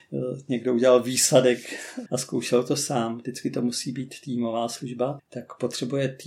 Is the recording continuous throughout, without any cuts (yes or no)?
no